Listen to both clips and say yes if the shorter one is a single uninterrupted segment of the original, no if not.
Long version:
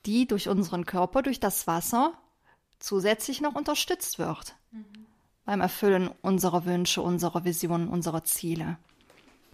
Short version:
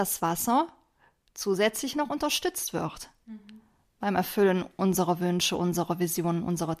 yes